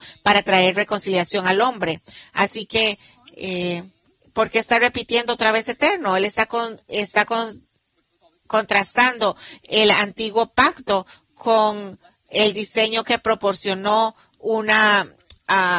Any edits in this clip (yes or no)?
no